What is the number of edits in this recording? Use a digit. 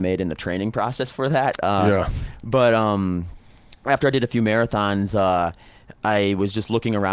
0